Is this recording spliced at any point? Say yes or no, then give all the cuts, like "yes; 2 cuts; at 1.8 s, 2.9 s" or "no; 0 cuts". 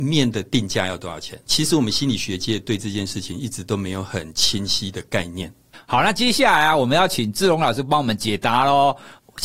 yes; 2 cuts; at 1.4 s, 5.7 s